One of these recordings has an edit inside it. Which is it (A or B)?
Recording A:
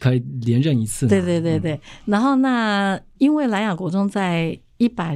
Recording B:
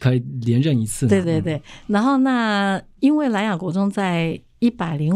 B